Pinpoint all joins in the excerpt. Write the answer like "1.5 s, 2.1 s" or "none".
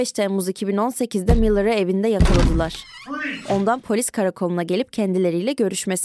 none

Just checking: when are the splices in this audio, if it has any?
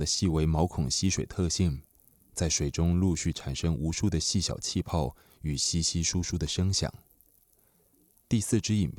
none

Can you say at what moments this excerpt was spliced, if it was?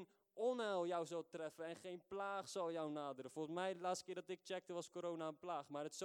none

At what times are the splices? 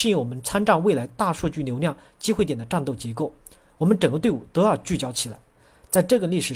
none

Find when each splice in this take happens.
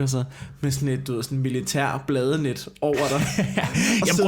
none

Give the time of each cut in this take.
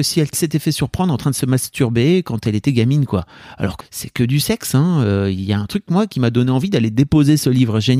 3.8 s

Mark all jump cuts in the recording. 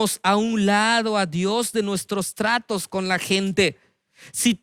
none

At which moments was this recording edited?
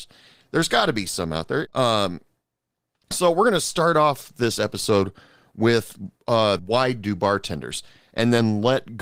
1.7 s, 6.6 s

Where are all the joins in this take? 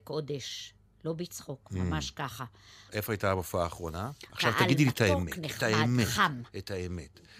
2.9 s, 4.3 s

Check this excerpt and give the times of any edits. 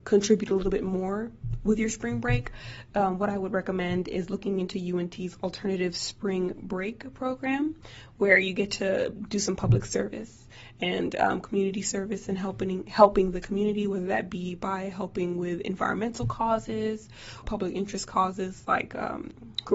9.2 s, 17.4 s

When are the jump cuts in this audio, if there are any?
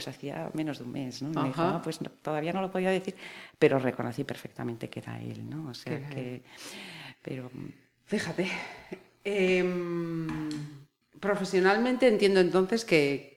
none

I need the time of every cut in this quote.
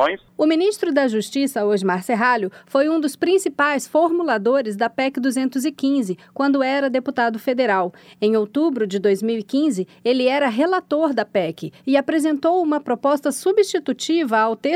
none

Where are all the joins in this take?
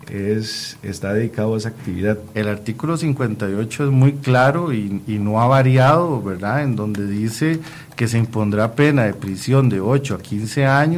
2.3 s

